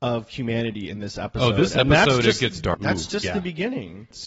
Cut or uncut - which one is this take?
cut